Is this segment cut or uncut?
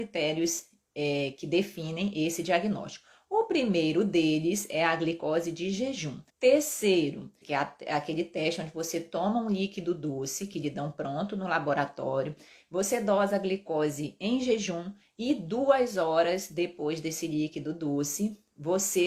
cut